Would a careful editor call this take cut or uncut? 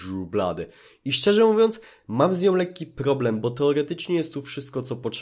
uncut